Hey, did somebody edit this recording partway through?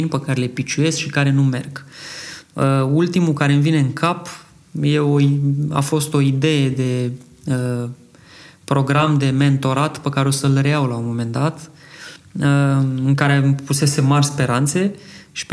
no; 0 cuts

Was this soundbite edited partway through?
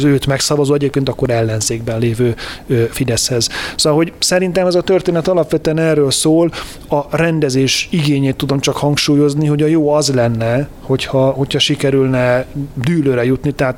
no; 0 cuts

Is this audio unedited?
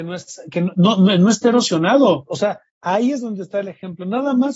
no; 1 cut; at 2.3 s

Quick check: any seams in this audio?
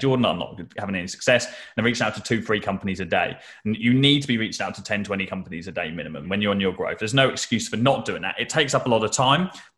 yes; 1 cut; at 6.2 s

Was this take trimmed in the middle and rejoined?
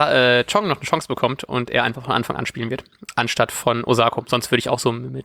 no; 0 cuts

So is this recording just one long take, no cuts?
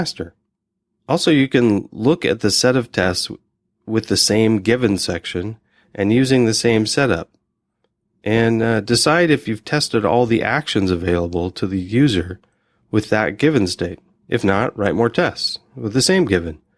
yes; 0 cuts

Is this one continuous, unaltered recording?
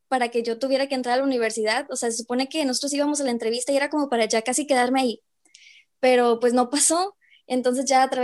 yes; 0 cuts

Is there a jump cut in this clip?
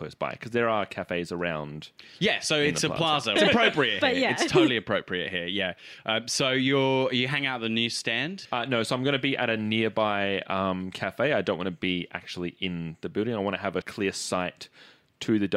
yes; 2 cuts; at 3.4 s, 13.8 s

